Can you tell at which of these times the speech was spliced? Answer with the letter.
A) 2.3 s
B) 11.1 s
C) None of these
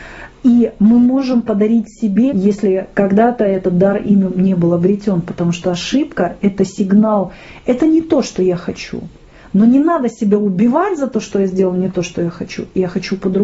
A